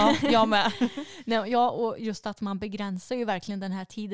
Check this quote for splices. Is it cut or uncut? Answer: uncut